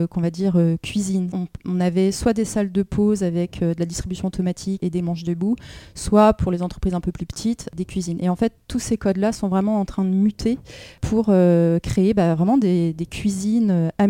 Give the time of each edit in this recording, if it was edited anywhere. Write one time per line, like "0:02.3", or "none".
0:01.3

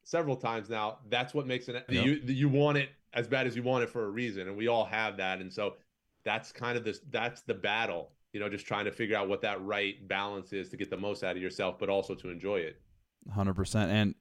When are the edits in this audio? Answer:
0:01.9

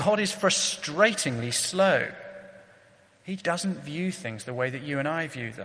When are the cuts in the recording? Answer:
0:03.4

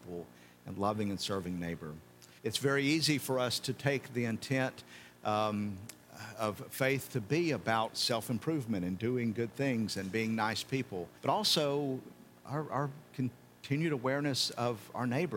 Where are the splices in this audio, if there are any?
0:02.4
0:11.2

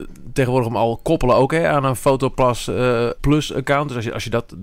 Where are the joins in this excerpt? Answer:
0:03.1

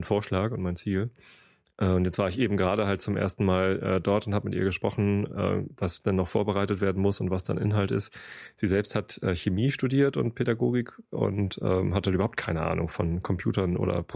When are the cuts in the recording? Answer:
none

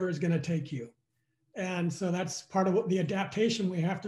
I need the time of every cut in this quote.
none

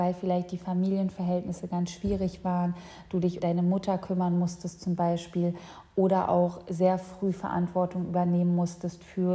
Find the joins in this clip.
0:03.4

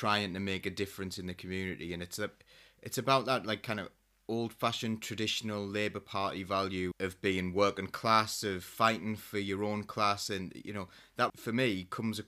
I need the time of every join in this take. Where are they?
0:06.9
0:11.3

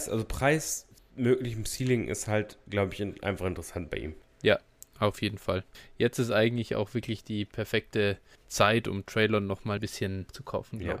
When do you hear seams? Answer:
none

